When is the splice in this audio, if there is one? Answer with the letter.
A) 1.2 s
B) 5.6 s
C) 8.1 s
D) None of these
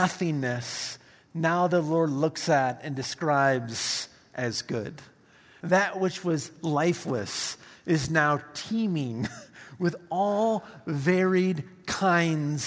B